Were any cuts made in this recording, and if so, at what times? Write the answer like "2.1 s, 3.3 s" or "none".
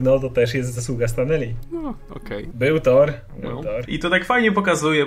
2.5 s, 3.9 s